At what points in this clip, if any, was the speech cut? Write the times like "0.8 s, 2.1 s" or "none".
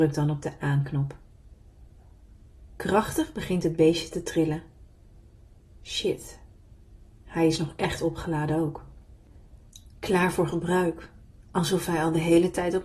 none